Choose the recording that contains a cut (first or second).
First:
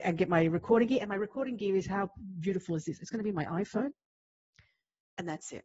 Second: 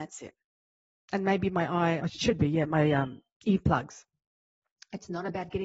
second